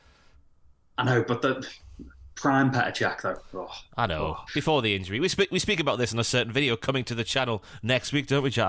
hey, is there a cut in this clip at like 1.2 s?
no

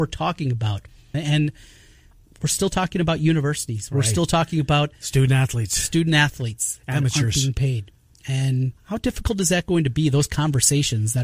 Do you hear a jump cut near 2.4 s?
no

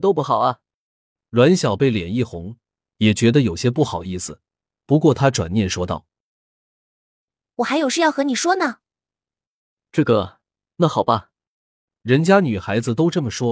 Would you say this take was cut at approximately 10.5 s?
no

